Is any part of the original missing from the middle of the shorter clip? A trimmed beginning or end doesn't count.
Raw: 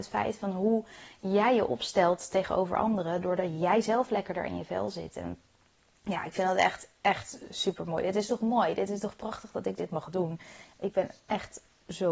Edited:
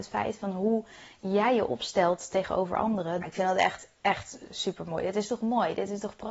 yes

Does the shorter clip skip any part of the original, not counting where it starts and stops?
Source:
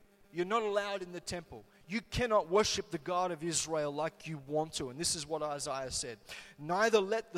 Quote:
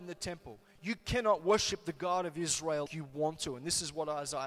yes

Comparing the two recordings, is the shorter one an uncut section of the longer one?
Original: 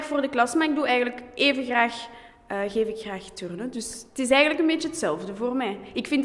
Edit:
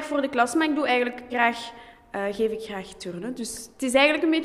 no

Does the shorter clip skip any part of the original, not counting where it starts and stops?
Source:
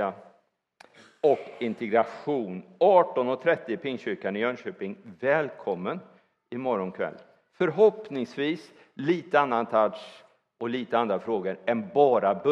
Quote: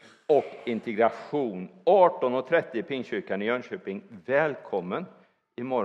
no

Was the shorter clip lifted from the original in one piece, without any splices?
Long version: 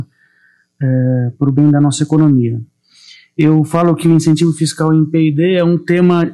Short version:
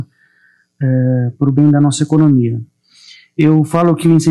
yes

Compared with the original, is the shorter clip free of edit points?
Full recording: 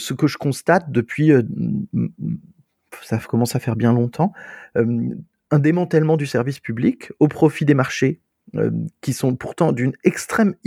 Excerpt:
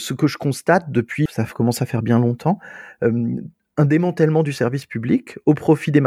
no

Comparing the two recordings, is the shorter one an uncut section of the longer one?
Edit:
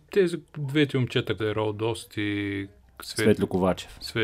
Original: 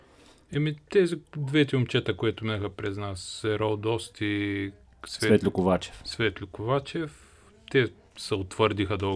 no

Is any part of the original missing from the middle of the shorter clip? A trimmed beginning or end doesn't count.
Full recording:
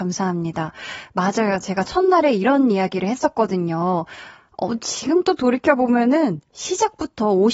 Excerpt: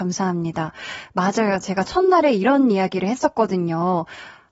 no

